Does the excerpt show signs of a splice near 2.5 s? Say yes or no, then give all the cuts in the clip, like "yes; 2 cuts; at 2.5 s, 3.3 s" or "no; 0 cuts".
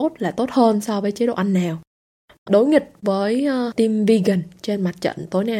yes; 1 cut; at 2.5 s